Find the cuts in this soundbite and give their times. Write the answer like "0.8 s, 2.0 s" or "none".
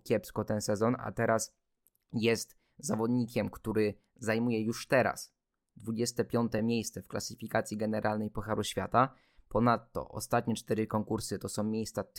none